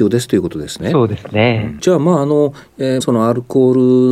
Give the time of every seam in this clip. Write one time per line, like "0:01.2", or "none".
0:01.8
0:03.0